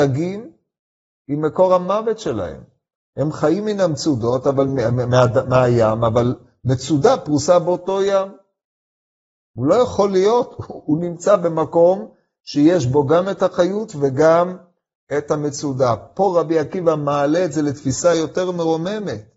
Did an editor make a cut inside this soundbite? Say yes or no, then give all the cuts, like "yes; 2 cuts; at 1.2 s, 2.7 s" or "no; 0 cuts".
no; 0 cuts